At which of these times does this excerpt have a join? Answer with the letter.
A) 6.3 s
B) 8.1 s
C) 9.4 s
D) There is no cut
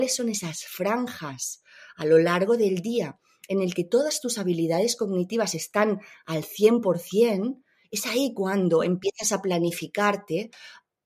D